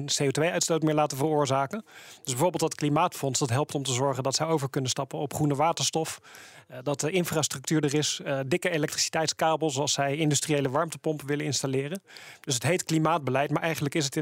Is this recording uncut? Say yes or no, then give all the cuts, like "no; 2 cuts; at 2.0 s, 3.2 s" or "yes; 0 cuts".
yes; 0 cuts